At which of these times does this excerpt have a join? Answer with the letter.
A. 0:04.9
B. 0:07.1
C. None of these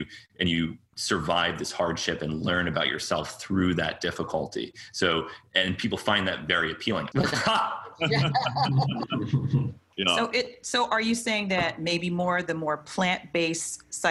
B